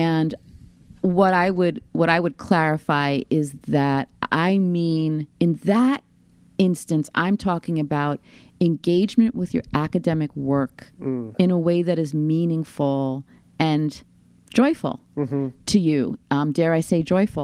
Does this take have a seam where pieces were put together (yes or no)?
no